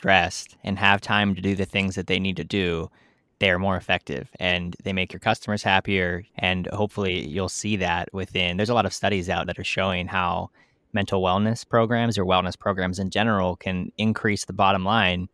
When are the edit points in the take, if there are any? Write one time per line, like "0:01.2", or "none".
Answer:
0:06.3
0:09.4